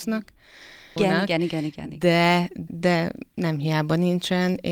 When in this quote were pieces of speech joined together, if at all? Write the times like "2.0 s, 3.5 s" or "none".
1.0 s, 2.7 s